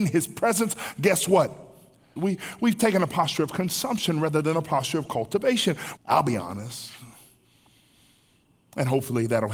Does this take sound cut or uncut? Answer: cut